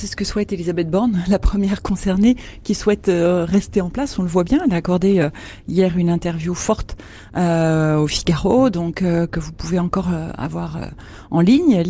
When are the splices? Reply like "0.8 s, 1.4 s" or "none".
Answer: none